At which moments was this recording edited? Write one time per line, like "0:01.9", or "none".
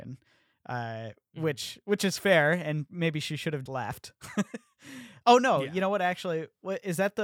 0:03.7